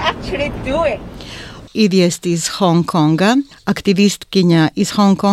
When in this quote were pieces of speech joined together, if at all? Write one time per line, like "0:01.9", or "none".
0:01.7